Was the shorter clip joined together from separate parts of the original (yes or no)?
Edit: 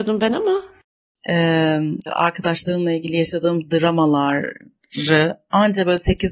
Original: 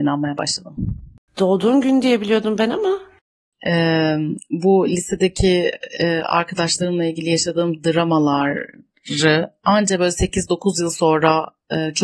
yes